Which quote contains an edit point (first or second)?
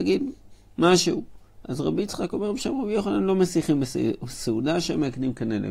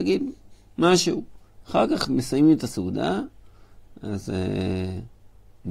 second